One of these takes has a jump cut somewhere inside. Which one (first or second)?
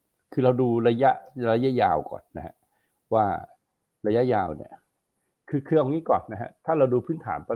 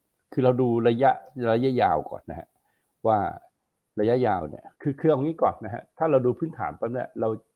second